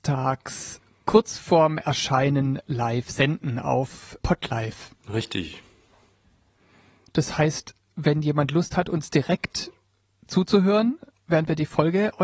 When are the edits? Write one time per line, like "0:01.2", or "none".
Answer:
0:04.2